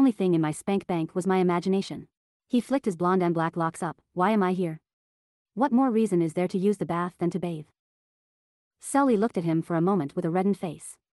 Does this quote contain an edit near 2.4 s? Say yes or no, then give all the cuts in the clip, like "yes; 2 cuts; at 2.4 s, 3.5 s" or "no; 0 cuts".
yes; 1 cut; at 2.4 s